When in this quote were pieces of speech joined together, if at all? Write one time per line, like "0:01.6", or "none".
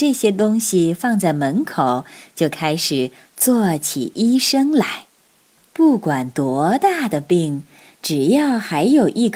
0:05.6